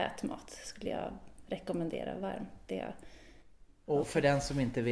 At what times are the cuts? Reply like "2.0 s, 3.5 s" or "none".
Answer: 4.0 s